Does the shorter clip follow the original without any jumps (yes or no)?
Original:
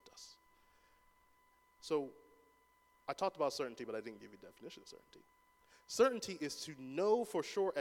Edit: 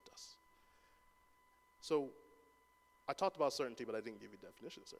yes